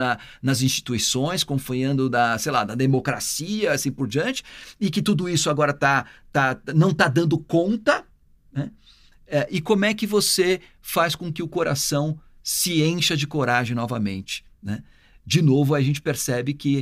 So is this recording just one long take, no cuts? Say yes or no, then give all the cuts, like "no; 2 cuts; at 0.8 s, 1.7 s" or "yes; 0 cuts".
yes; 0 cuts